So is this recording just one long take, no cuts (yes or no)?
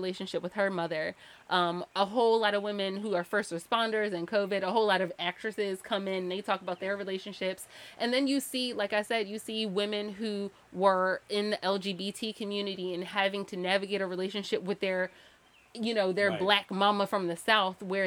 yes